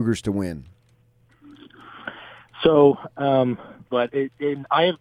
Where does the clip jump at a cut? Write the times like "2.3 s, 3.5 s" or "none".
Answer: 3.9 s